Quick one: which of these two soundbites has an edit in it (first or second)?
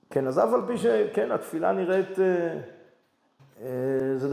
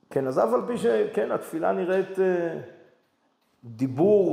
first